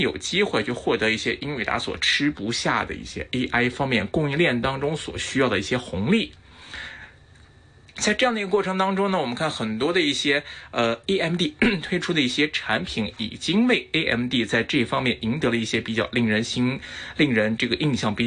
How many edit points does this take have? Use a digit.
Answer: 0